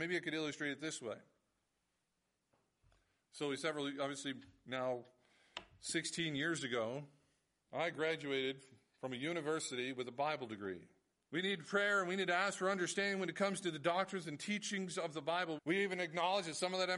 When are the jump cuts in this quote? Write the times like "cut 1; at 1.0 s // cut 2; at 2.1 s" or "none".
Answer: cut 1; at 11.1 s // cut 2; at 15.6 s